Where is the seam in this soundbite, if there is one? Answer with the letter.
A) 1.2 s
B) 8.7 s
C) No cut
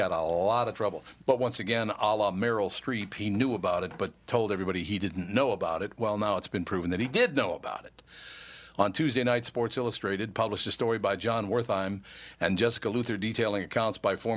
A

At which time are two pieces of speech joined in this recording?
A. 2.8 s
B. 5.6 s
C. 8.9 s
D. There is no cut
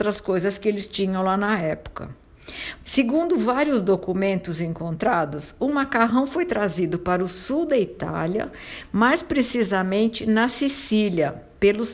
A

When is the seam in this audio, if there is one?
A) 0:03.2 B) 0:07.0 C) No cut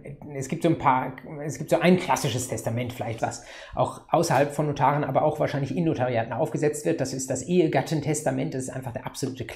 A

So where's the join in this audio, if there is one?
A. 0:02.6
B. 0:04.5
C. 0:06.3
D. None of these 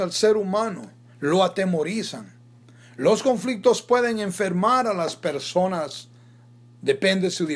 D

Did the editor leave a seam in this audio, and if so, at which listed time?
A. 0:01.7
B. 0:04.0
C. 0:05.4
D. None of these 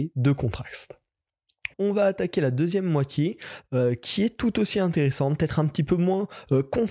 A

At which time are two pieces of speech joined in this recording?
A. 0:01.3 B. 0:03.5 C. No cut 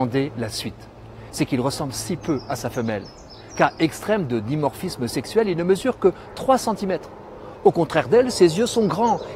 A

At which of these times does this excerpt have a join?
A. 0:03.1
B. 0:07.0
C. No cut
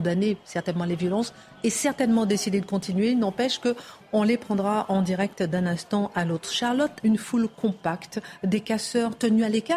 B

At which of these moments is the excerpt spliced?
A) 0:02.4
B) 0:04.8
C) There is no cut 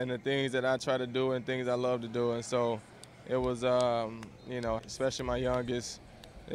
B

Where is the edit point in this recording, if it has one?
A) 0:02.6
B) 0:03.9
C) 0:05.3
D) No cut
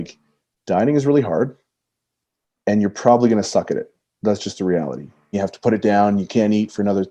C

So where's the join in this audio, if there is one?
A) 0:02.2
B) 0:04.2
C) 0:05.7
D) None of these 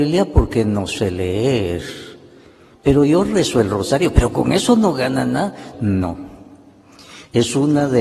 C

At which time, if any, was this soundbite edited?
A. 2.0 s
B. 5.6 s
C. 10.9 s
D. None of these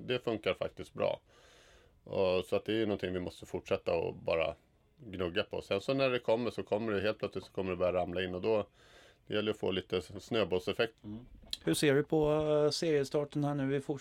C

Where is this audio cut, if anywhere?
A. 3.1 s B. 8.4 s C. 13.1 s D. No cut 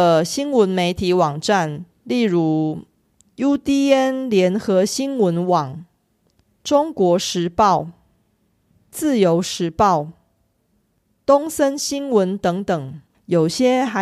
C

